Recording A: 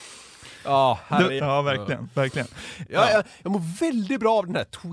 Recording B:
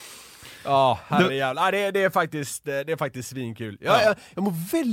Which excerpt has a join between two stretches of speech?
A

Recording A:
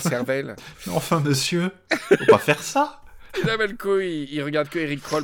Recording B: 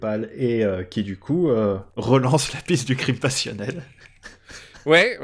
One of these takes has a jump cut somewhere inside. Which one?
B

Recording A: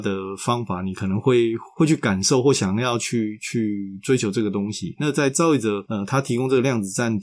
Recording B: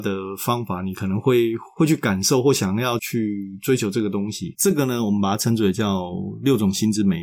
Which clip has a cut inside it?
B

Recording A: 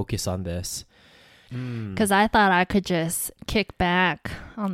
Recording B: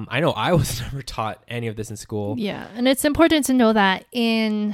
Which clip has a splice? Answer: A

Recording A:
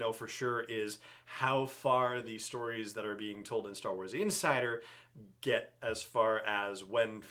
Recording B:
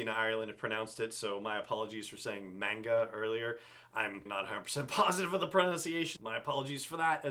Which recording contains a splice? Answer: B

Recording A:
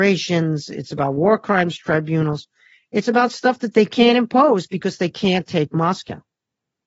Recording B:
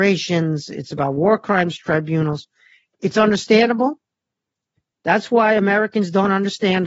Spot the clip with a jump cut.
B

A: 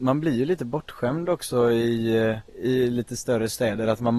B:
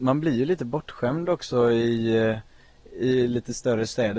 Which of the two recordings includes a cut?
A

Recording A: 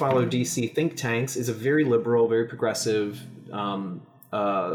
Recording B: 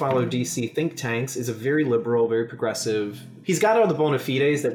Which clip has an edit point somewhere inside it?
B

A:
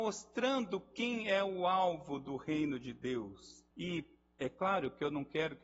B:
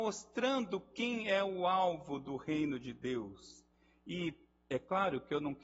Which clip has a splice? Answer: A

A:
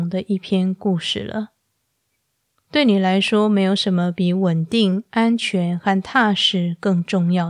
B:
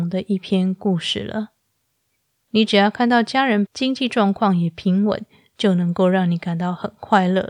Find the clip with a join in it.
B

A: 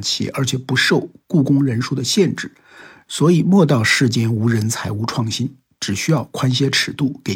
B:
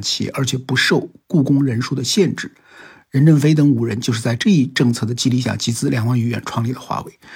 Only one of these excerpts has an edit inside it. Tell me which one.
A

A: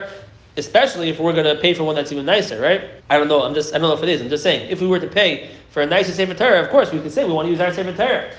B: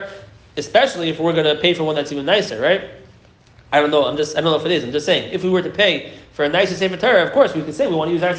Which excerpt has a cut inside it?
A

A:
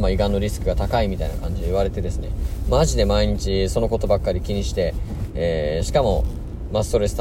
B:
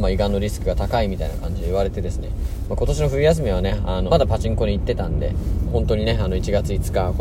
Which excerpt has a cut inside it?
B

